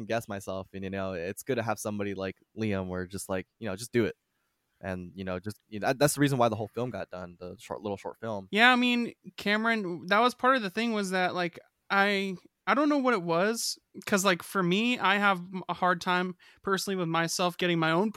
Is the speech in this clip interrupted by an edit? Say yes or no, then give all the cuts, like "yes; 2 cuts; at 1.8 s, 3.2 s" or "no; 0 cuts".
no; 0 cuts